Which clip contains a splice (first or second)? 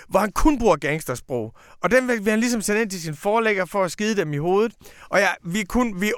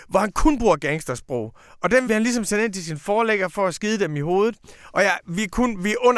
second